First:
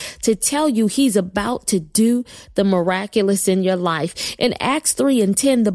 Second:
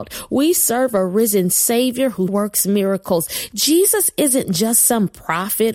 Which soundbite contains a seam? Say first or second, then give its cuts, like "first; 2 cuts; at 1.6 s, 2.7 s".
second; 1 cut; at 2.3 s